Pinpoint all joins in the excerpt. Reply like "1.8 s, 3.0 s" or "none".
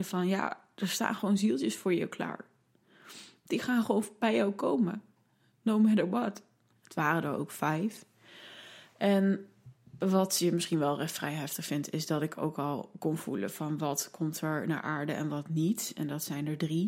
6.7 s

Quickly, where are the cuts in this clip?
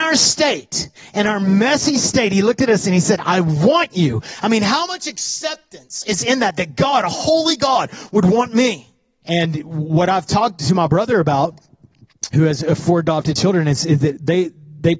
9.2 s

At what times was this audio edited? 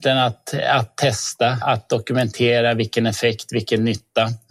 1.6 s

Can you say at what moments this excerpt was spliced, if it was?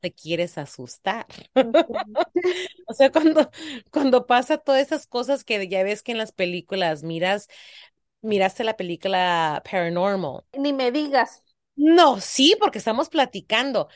none

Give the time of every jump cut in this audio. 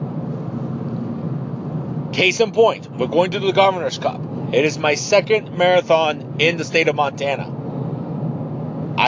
none

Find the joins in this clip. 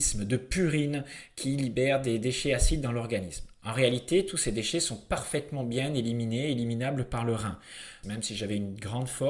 8.0 s

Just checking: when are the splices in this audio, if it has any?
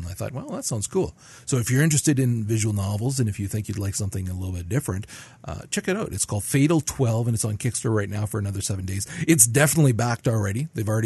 none

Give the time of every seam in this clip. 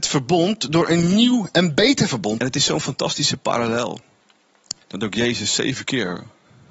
2.4 s, 4.8 s

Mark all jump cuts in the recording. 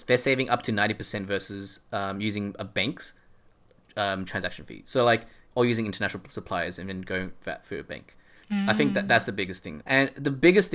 8.4 s, 9.8 s

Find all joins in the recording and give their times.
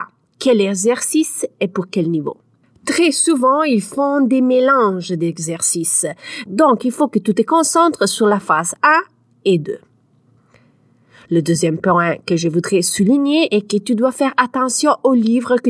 6.5 s

